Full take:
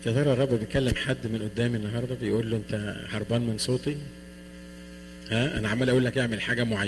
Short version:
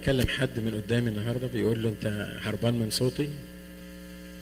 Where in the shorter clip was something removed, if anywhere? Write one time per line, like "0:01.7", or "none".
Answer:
none